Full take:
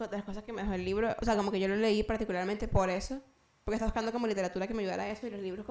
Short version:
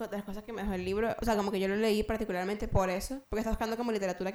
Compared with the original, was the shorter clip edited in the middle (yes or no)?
yes